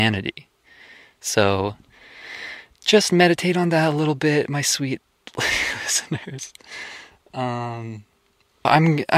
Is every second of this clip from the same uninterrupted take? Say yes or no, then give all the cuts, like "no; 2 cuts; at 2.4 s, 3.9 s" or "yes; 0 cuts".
yes; 0 cuts